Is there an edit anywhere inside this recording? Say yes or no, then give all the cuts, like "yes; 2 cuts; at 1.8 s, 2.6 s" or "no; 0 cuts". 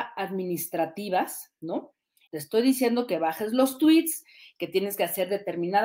yes; 1 cut; at 2.3 s